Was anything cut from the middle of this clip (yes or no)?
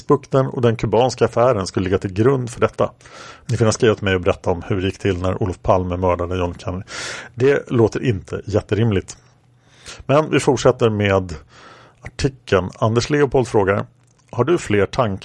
yes